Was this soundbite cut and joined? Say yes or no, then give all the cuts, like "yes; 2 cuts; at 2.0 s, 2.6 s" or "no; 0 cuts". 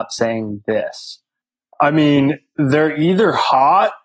no; 0 cuts